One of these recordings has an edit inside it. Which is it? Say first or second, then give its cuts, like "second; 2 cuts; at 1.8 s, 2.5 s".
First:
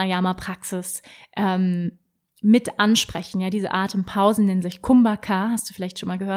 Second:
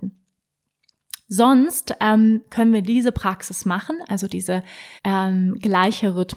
second; 1 cut; at 5.0 s